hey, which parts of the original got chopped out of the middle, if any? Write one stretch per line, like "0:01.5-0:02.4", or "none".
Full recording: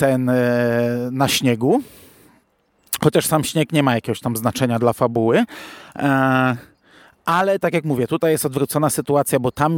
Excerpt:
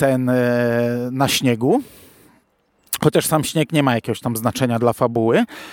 none